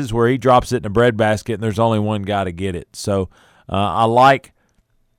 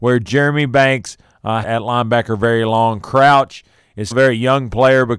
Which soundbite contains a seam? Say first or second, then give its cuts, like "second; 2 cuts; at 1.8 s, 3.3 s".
second; 2 cuts; at 1.6 s, 4.1 s